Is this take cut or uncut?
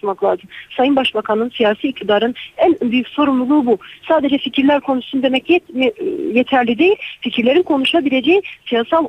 uncut